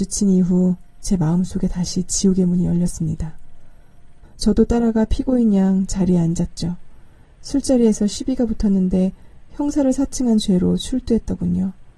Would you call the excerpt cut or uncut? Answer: cut